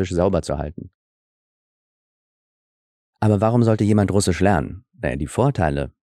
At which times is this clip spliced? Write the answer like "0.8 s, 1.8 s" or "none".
none